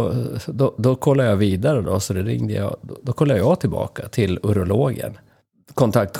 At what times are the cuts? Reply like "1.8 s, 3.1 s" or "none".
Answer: none